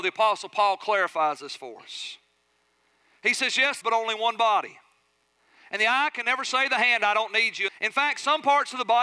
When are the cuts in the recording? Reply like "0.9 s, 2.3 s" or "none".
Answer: 3.8 s, 7.7 s

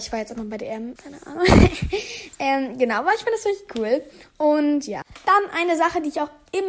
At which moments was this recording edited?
1.0 s

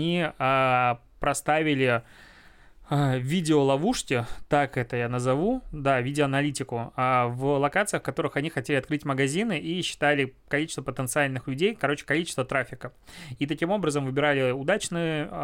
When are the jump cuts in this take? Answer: none

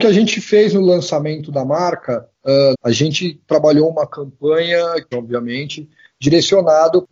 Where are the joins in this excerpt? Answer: 2.7 s, 5.1 s

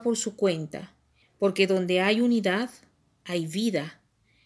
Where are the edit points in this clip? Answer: 1.2 s

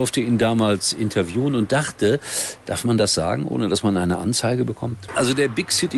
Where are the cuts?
5.1 s

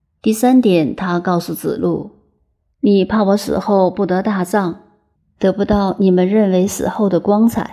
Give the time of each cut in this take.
none

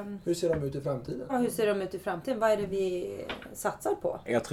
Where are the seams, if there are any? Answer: 1.3 s

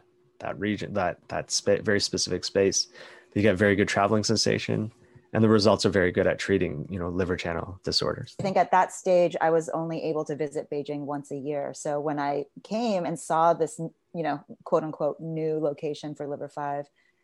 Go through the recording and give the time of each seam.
8.4 s

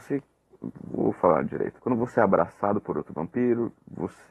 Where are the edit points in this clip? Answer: 1.8 s

